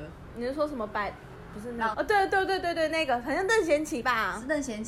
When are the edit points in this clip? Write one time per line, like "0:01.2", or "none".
0:01.9